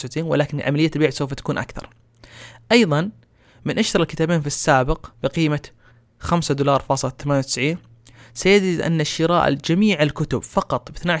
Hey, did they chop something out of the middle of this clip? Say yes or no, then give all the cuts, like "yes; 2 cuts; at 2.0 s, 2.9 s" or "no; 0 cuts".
yes; 1 cut; at 5.1 s